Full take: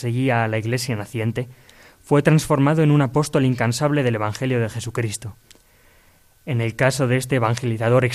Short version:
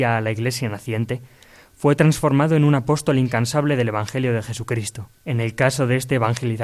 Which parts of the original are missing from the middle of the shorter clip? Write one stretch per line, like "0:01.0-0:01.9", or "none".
0:05.4-0:06.4